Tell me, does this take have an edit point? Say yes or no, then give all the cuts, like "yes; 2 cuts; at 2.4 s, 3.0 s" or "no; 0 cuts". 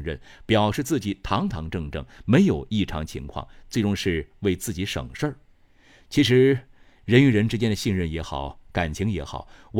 no; 0 cuts